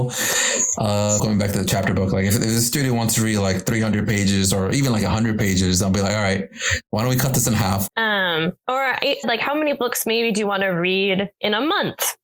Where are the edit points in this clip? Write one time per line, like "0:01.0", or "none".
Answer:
0:01.2
0:07.9
0:09.2